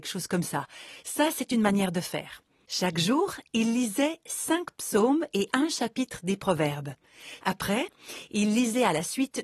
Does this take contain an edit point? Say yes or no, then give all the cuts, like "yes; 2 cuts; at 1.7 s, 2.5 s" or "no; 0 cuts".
yes; 2 cuts; at 2.7 s, 7.4 s